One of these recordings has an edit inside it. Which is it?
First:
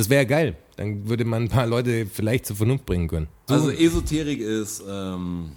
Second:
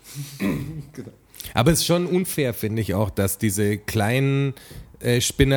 first; 1 cut; at 3.5 s

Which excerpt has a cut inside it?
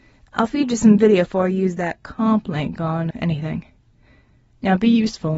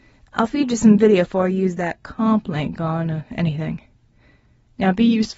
first; 1 cut; at 3.1 s

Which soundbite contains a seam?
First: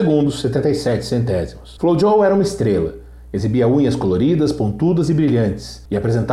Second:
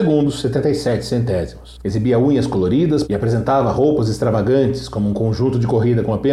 second; 2 cuts; at 1.8 s, 3.0 s

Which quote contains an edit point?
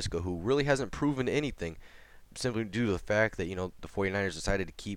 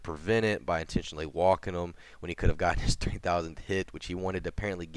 first; 1 cut; at 2.3 s

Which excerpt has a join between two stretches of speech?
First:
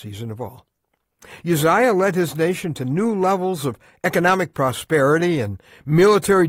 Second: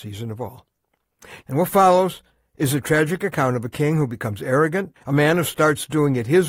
second; 2 cuts; at 1.4 s, 5.0 s

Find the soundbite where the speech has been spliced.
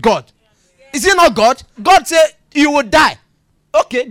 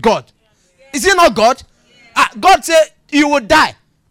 first; 1 cut; at 1.8 s

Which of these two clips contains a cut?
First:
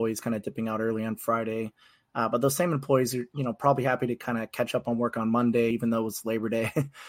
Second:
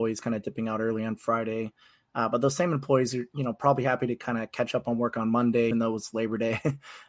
second; 1 cut; at 5.7 s

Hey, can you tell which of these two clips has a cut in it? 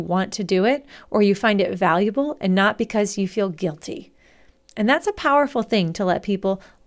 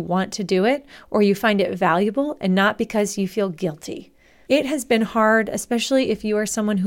second; 1 cut; at 4.5 s

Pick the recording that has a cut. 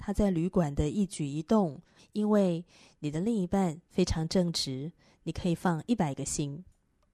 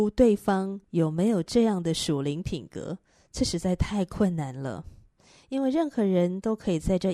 first; 1 cut; at 2.0 s

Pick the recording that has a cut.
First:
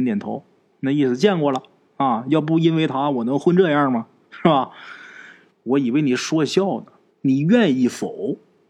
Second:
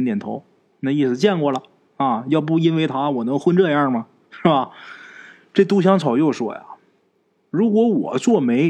first; 2 cuts; at 5.5 s, 7.1 s

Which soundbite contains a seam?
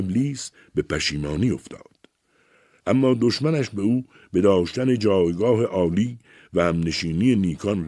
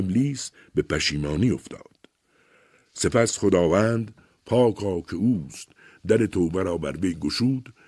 first; 1 cut; at 2.8 s

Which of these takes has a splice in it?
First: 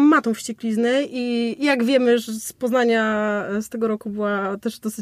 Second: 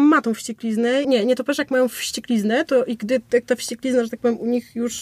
second; 1 cut; at 1.0 s

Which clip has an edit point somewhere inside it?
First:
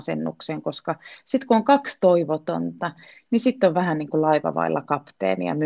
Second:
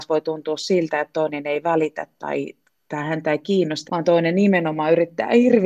second; 1 cut; at 3.9 s

